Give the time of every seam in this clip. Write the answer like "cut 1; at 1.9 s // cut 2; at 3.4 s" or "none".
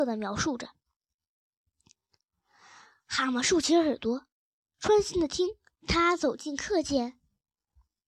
cut 1; at 5.8 s